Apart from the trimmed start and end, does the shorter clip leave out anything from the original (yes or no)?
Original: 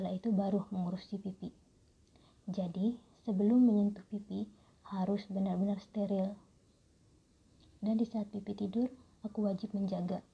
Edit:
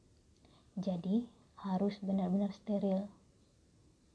yes